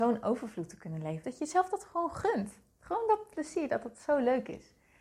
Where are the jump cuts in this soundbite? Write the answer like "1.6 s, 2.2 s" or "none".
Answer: 1.2 s